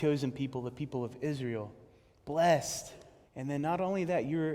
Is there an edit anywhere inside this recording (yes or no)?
yes